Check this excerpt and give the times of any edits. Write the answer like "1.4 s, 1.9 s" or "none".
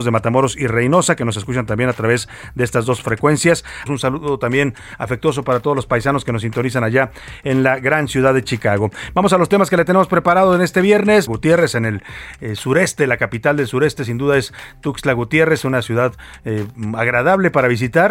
3.9 s, 11.3 s